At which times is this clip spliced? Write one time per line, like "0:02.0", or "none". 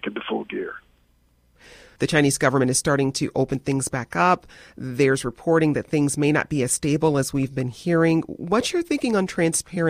0:02.0